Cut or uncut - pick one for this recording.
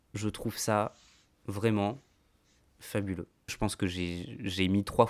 cut